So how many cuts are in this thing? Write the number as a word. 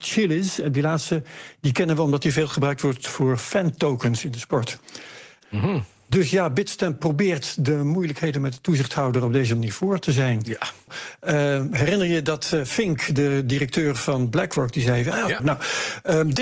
three